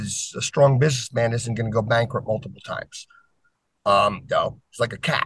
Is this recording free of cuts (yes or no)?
no